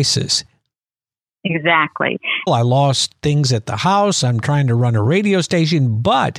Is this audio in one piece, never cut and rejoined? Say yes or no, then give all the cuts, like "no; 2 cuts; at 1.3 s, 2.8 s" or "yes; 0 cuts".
no; 1 cut; at 2.5 s